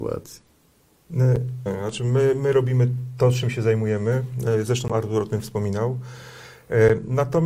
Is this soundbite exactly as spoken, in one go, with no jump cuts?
no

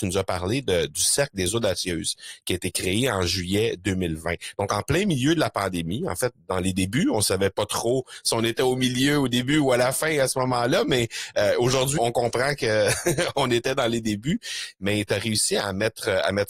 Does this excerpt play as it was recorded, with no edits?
no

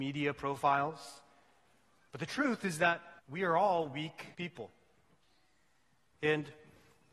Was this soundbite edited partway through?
yes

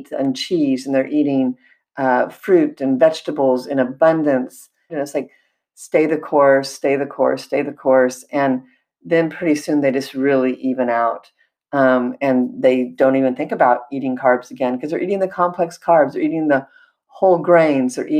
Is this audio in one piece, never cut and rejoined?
no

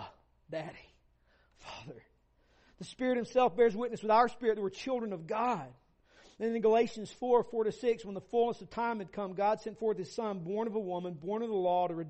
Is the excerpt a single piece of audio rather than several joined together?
yes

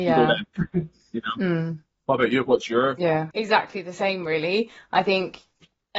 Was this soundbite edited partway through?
yes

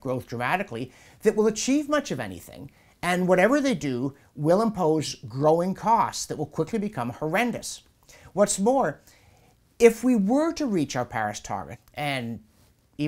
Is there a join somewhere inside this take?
yes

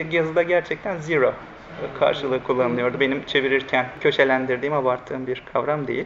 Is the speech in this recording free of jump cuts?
yes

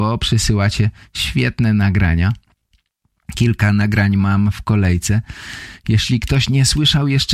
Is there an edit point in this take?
no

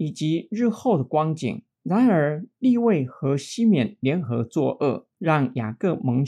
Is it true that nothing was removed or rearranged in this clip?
no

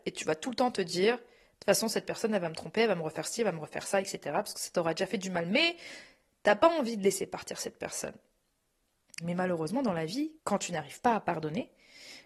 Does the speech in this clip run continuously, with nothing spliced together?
no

